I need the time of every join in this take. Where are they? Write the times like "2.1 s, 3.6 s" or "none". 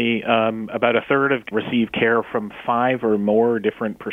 1.5 s